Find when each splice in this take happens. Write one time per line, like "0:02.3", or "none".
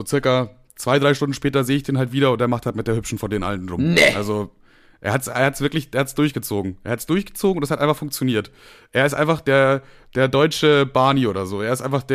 none